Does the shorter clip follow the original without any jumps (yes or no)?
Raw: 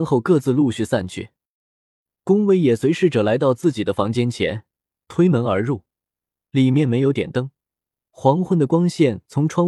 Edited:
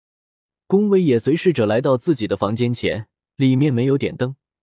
no